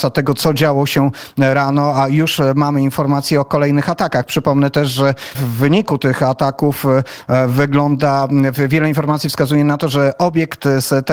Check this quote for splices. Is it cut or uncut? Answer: cut